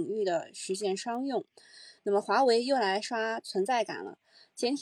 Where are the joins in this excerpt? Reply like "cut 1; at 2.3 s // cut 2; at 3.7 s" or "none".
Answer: cut 1; at 2.0 s